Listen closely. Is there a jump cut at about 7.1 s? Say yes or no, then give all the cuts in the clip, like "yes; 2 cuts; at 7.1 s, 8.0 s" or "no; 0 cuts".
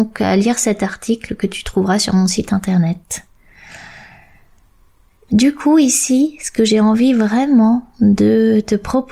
no; 0 cuts